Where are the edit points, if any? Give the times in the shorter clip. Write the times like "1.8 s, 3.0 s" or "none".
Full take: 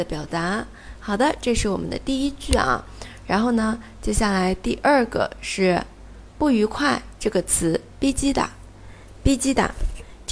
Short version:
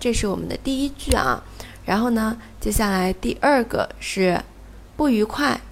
none